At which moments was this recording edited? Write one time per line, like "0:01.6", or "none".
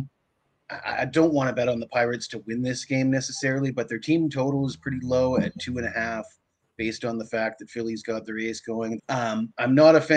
0:09.0